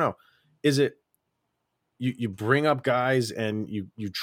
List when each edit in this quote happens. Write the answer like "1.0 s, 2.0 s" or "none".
none

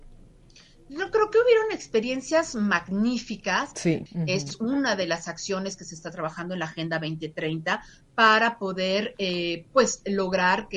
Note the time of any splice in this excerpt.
4.1 s

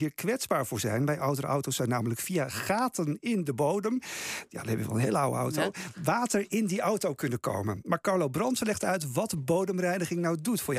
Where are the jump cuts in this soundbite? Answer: none

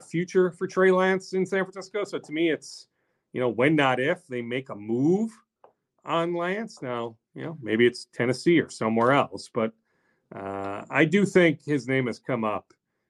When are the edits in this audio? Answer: none

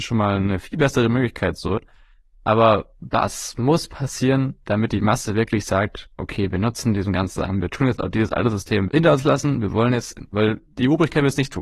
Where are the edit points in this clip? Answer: 8.9 s

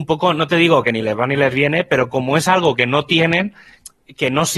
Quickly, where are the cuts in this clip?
none

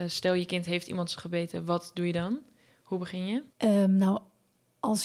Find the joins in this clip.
3.5 s

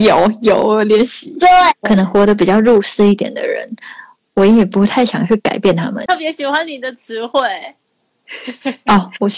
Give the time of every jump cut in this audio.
1.7 s, 6.1 s

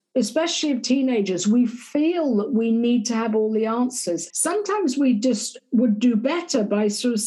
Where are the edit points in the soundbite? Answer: 4.3 s

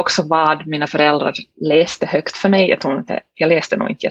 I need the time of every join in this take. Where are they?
none

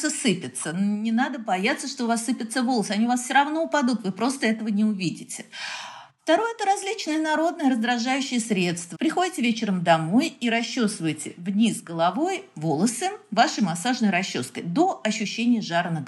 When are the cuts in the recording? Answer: 8.9 s

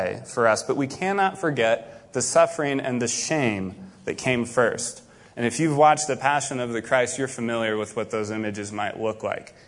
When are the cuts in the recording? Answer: none

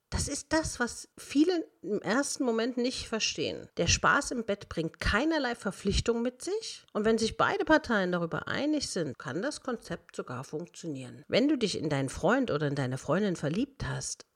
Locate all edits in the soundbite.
9.1 s, 11.2 s

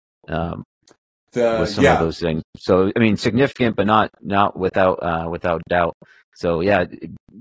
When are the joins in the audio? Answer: none

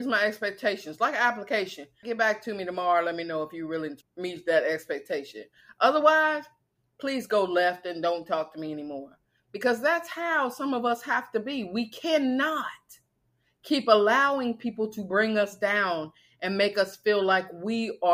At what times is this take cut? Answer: 2.0 s, 4.0 s

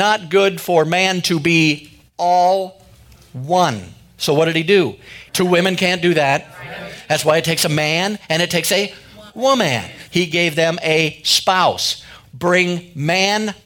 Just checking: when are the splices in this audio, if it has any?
5.3 s, 10.1 s, 12.2 s

